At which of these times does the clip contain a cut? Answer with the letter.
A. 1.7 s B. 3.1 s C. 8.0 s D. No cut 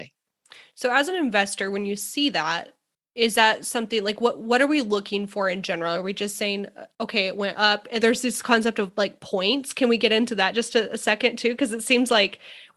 C